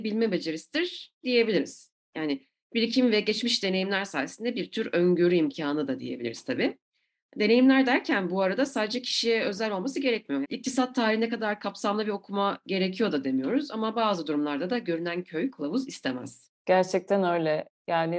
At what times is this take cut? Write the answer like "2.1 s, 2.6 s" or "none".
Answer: 10.4 s